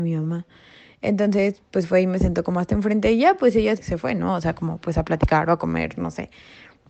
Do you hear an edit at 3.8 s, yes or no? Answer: yes